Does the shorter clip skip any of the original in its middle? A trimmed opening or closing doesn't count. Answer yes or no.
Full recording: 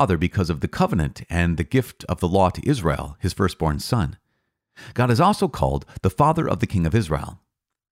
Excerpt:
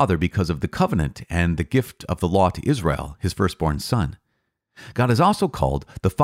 no